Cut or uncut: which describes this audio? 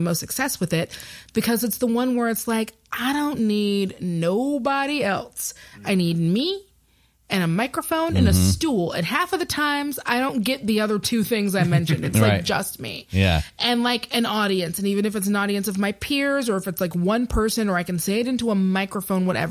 uncut